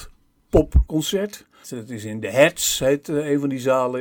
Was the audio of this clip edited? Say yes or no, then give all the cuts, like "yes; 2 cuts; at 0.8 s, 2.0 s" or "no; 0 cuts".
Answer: yes; 1 cut; at 1.6 s